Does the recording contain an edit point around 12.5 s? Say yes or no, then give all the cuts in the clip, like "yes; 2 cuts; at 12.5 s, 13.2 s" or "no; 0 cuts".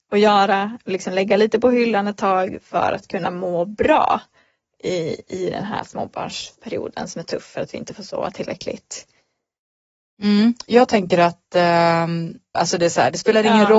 yes; 1 cut; at 12.5 s